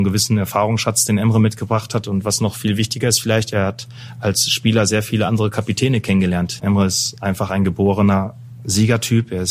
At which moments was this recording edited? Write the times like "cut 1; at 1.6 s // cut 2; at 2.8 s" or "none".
cut 1; at 6.6 s